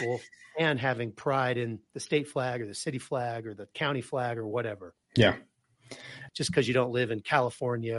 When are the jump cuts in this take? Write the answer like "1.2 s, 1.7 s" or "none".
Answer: 5.0 s, 6.3 s